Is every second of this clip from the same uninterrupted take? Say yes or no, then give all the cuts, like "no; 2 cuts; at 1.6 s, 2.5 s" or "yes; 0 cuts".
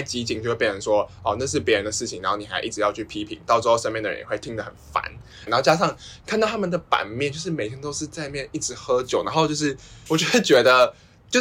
no; 2 cuts; at 5.5 s, 10.1 s